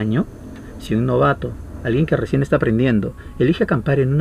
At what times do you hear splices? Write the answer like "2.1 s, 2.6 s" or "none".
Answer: none